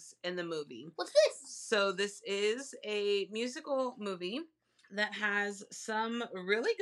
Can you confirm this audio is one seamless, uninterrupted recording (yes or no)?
no